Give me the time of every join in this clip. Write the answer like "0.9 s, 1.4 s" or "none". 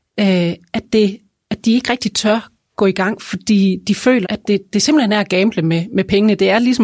4.2 s